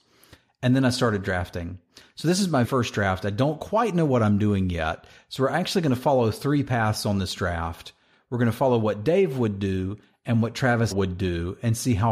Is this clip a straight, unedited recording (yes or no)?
no